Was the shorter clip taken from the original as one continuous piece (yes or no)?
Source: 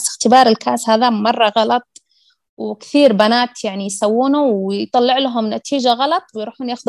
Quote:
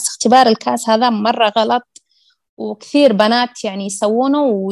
yes